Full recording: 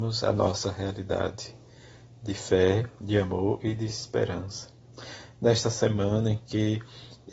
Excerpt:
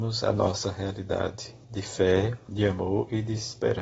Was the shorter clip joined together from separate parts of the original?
yes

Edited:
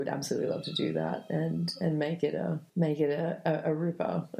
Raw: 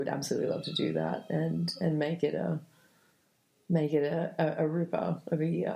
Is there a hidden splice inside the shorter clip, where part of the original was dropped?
yes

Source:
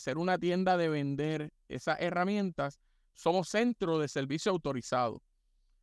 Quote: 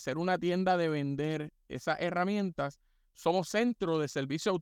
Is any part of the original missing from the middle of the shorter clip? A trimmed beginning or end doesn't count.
no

